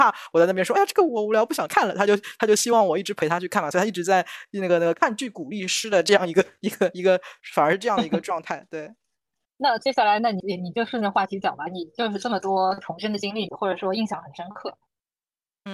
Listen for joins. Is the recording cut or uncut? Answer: cut